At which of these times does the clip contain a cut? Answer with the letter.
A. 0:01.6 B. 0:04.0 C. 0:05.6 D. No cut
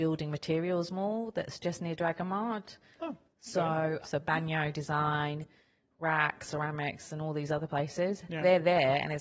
B